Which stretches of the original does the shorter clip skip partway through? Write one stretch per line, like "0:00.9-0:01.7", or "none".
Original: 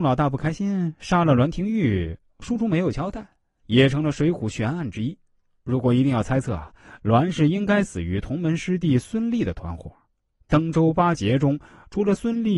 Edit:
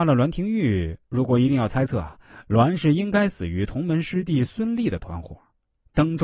0:02.2-0:05.6